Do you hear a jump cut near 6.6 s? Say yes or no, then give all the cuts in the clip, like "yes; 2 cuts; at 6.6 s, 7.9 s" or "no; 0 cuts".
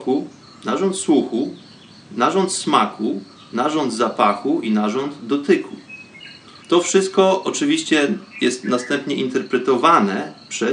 yes; 1 cut; at 6.6 s